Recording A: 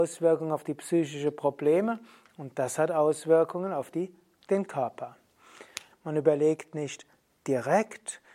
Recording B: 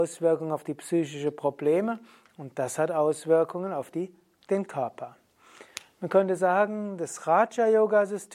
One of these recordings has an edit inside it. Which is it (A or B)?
A